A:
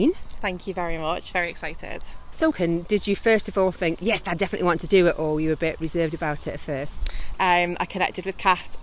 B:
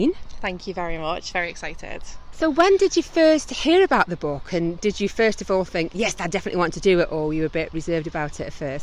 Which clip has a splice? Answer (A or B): A